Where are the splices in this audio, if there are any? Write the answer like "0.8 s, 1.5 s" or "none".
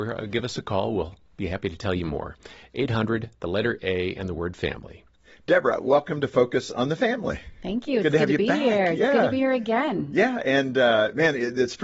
none